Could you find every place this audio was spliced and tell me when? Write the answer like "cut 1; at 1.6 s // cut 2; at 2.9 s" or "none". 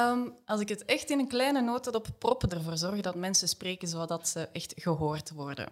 cut 1; at 2.5 s